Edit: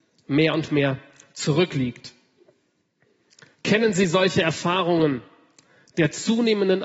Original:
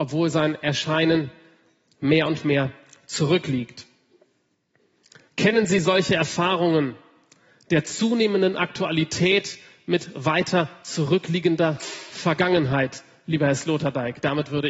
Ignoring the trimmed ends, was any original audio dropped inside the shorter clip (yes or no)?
no